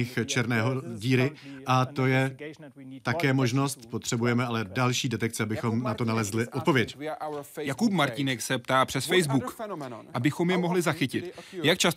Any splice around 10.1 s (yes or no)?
yes